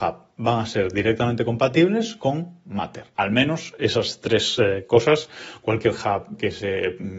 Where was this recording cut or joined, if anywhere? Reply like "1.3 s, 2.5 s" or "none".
3.1 s